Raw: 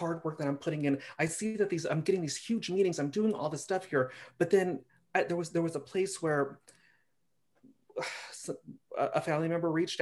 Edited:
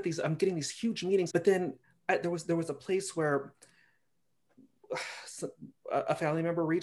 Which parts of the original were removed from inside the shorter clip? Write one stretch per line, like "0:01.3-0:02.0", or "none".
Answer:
0:03.0-0:04.4